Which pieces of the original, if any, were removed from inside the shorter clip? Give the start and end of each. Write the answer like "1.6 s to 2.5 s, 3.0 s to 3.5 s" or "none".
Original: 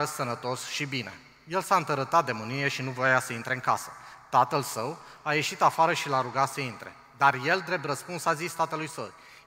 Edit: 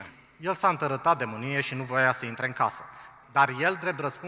4.3 s to 7.1 s